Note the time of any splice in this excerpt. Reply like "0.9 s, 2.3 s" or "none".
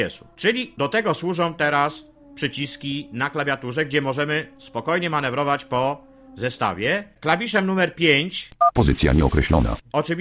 none